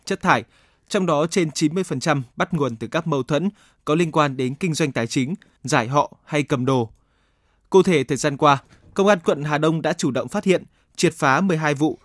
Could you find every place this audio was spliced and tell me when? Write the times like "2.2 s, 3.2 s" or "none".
5.6 s